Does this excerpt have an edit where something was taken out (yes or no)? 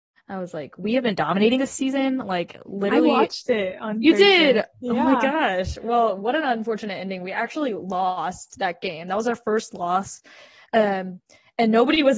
no